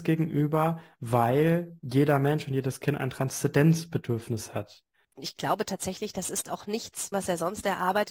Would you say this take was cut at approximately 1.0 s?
no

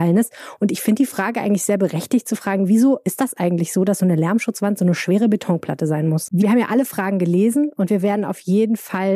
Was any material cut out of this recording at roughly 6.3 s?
yes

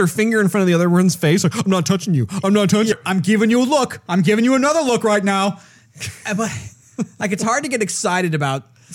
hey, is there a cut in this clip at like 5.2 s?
no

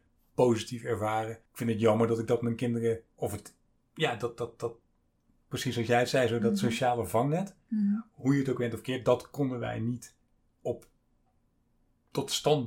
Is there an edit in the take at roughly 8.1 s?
no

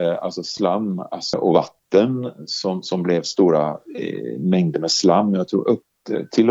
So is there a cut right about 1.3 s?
yes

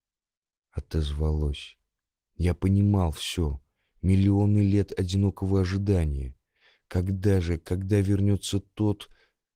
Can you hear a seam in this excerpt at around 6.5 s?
no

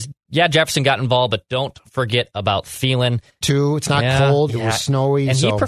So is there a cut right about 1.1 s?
no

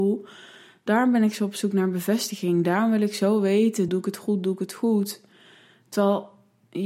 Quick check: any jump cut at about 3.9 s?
yes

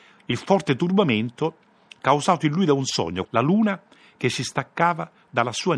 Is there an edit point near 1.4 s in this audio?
no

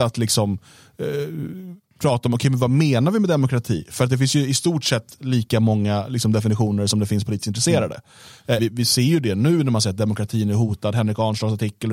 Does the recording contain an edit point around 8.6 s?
yes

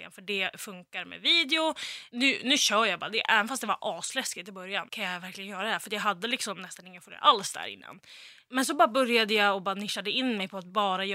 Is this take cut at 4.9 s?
yes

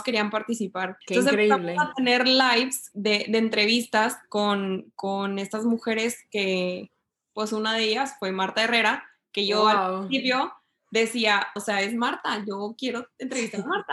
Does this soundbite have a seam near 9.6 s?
no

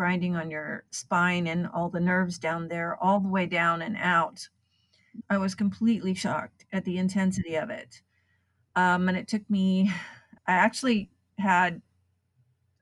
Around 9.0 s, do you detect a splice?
no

